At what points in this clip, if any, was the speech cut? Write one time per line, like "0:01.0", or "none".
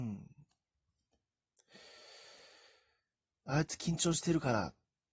0:03.4